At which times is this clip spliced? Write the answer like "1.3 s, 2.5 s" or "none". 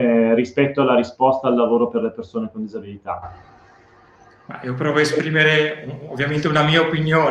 none